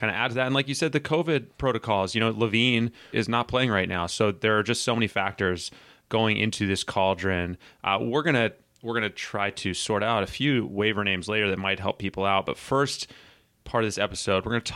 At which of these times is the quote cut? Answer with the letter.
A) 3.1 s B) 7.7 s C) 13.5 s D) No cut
A